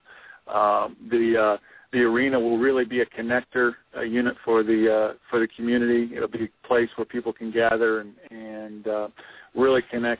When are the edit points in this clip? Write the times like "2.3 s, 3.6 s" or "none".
none